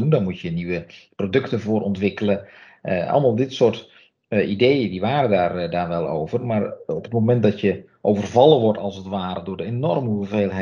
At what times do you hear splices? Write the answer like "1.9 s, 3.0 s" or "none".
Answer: none